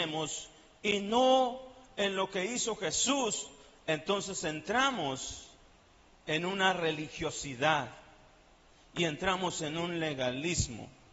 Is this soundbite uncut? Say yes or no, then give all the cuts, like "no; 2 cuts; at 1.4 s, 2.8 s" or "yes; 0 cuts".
yes; 0 cuts